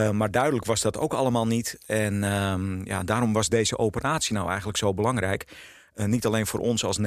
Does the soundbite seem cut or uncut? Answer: uncut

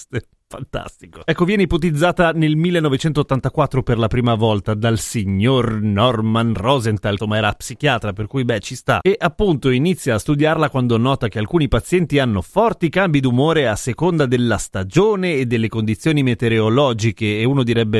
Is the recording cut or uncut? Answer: cut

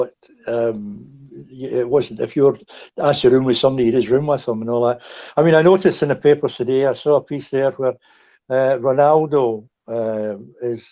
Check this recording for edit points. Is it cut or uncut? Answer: uncut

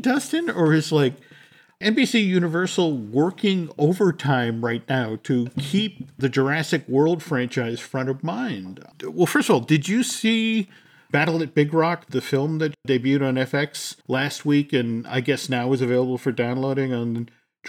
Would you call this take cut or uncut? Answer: cut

